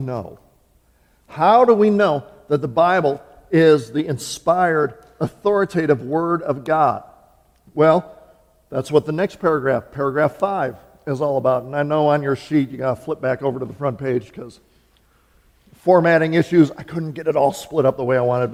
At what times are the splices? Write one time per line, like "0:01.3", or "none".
none